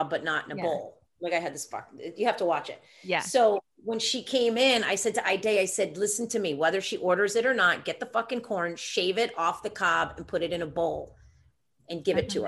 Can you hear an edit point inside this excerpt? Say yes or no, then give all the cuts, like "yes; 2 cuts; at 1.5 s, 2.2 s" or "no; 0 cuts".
no; 0 cuts